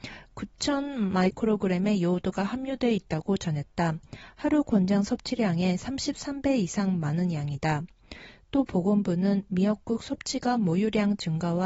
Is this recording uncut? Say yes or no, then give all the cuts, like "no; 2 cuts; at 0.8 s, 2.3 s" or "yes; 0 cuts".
yes; 0 cuts